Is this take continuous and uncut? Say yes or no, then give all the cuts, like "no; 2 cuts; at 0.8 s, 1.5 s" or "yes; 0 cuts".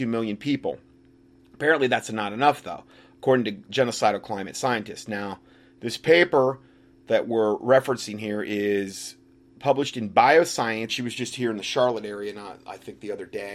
no; 1 cut; at 10.9 s